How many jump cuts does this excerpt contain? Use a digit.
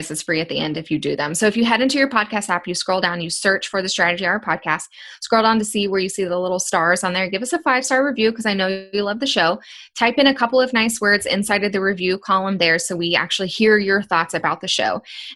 0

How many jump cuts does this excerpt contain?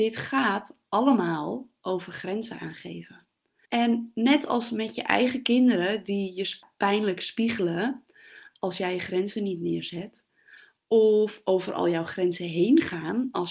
1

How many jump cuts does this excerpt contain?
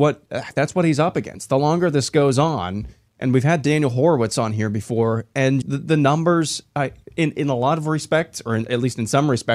1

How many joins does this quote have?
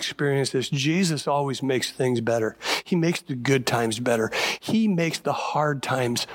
1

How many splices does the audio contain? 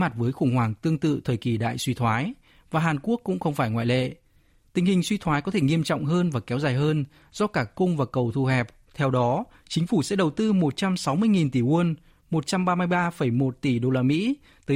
1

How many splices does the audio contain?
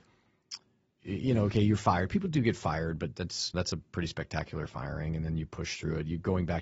0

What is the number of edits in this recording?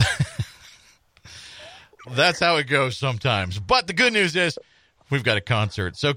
1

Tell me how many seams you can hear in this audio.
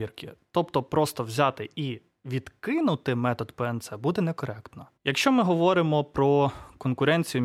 1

